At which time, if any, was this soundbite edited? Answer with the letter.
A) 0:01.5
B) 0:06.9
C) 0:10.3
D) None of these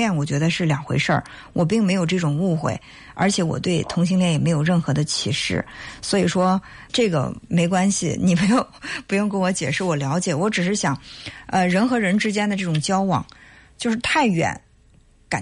B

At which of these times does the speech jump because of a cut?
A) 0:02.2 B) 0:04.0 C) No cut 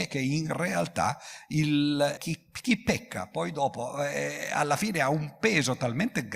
A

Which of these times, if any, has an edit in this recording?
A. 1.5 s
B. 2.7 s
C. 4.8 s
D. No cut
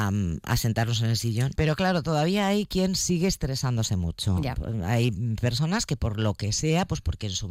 A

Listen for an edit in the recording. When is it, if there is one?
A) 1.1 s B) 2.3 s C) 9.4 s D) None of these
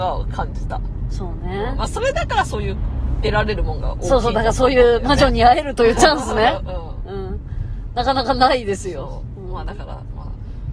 D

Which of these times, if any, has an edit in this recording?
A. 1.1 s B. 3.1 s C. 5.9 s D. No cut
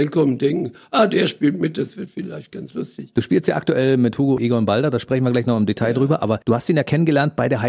B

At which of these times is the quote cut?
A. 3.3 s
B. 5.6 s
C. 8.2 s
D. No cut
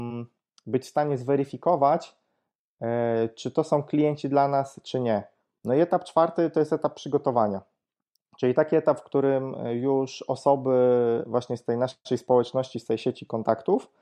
B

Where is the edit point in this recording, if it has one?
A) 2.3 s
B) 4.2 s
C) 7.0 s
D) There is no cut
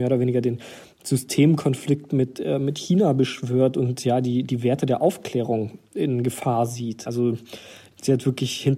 C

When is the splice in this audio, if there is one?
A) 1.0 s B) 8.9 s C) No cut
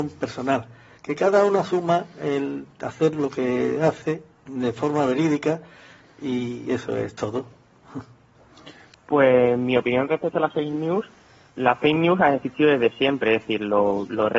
B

